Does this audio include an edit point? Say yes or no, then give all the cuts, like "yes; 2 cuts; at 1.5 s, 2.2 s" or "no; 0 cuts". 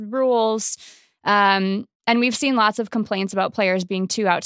no; 0 cuts